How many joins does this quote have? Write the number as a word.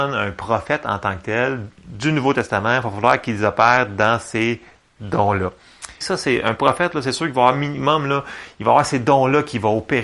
two